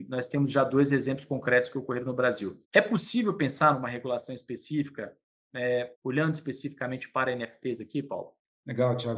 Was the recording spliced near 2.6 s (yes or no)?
yes